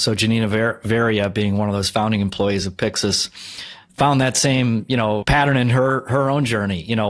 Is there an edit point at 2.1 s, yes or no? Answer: no